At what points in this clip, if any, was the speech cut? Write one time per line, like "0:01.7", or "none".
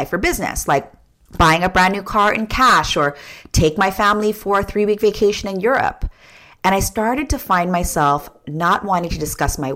none